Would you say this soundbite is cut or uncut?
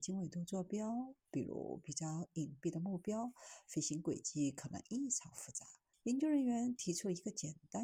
cut